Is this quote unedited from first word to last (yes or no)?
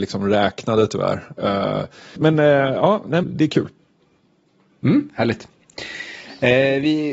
no